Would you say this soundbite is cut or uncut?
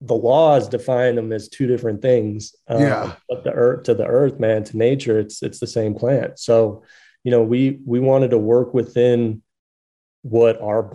uncut